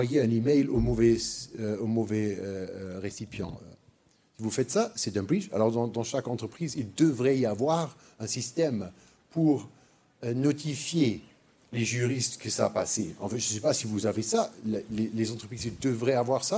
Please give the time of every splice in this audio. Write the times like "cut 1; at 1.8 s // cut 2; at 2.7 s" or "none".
none